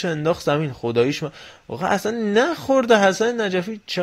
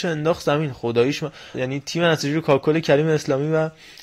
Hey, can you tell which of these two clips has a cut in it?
second; 1 cut; at 1.5 s

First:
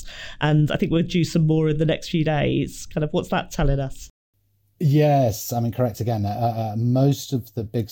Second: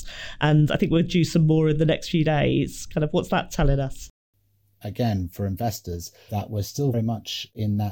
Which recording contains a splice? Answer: second; 2 cuts; at 4.7 s, 6.9 s

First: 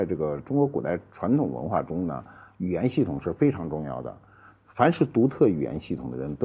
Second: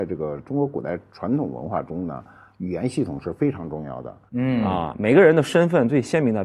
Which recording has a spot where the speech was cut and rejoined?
second; 1 cut; at 4.3 s

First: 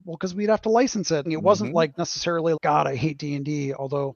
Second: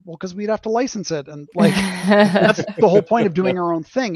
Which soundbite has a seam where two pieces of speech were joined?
first; 2 cuts; at 1.3 s, 2.5 s

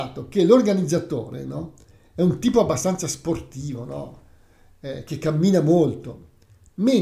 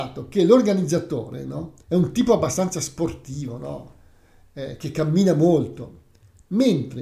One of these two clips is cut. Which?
second; 1 cut; at 1.8 s

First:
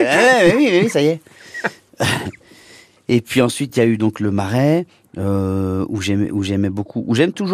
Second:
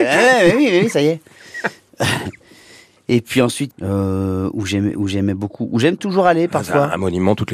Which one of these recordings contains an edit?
second; 1 cut; at 3.7 s

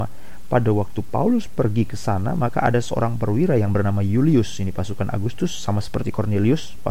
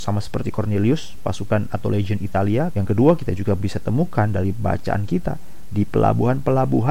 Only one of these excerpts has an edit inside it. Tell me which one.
second; 1 cut; at 2.7 s

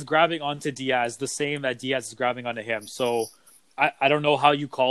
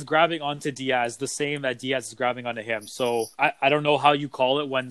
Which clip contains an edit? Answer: second; 1 cut; at 3.3 s

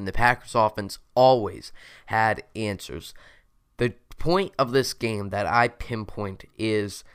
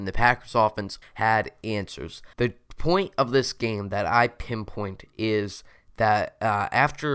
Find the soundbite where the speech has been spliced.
second; 2 cuts; at 1.0 s, 2.3 s

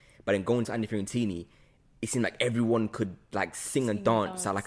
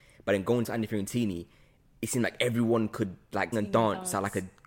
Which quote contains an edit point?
second; 1 cut; at 3.5 s

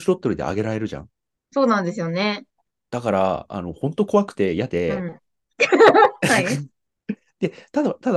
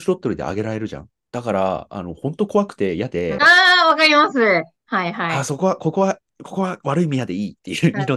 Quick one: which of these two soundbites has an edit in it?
second; 2 cuts; at 1.3 s, 3.4 s

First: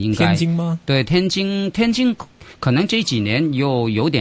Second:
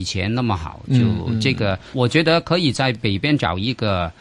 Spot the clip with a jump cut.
second; 1 cut; at 1.9 s

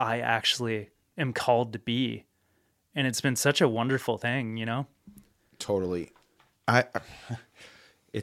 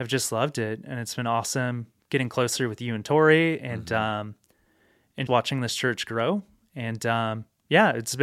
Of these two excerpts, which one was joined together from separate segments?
second; 1 cut; at 5.3 s

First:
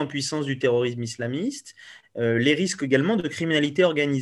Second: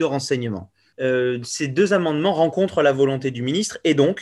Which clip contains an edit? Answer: second; 1 cut; at 0.9 s

